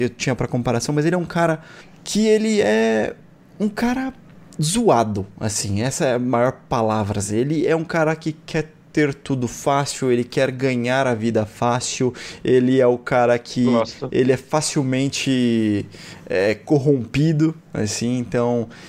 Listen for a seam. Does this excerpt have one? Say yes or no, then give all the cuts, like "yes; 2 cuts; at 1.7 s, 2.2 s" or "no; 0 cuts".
no; 0 cuts